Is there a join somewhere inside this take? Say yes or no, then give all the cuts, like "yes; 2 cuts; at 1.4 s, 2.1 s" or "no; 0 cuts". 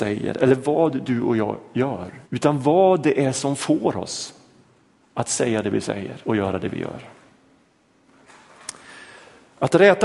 yes; 2 cuts; at 2.2 s, 6.2 s